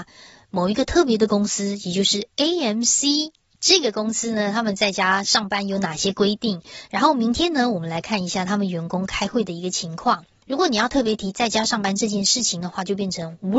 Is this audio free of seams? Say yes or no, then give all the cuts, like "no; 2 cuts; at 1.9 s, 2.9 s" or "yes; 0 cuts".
no; 1 cut; at 10.4 s